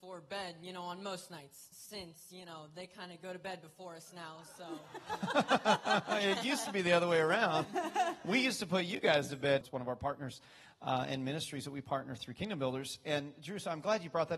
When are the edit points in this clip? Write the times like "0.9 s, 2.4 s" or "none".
9.6 s